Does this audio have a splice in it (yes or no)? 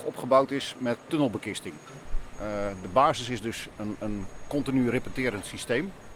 no